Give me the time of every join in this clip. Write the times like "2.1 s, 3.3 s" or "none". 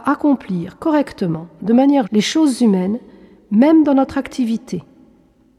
2.0 s